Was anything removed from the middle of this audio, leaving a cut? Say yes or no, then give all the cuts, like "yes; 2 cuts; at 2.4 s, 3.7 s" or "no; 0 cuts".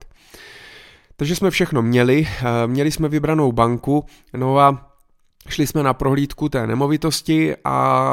no; 0 cuts